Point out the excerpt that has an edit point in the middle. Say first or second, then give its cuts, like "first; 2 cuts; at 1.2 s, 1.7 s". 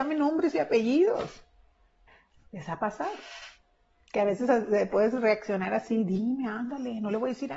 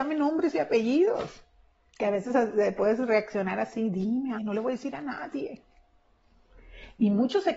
second; 2 cuts; at 1.8 s, 4.3 s